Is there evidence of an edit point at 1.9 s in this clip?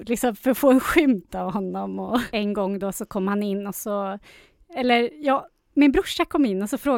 no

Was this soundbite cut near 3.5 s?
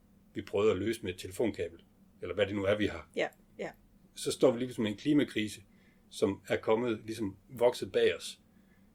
yes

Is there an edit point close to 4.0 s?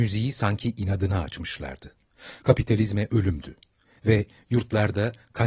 no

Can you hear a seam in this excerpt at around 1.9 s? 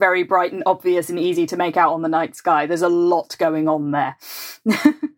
no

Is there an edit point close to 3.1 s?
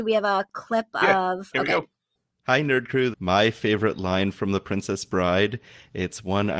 yes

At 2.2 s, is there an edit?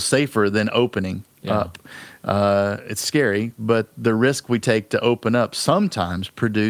yes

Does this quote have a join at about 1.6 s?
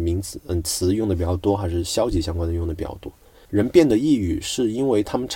no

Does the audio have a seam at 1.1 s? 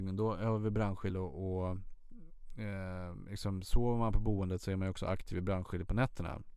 yes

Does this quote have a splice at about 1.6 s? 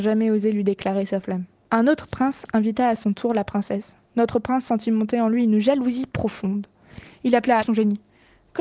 no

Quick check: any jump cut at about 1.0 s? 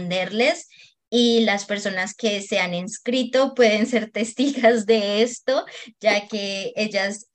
no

